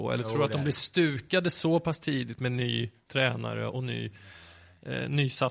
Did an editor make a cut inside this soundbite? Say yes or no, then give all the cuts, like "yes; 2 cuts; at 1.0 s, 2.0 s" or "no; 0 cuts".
no; 0 cuts